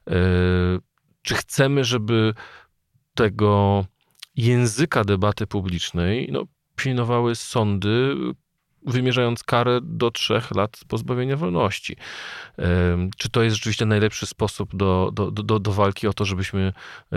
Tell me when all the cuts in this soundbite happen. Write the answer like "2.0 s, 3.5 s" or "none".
none